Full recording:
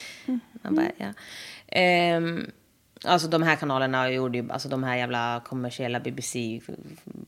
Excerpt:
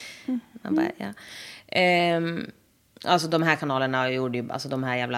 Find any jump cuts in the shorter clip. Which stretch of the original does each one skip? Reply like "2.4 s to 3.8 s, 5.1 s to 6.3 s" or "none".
none